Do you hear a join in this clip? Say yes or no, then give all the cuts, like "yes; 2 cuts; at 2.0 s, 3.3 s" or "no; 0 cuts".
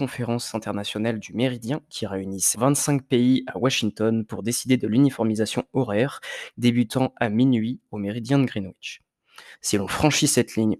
yes; 3 cuts; at 2.5 s, 6.5 s, 9.5 s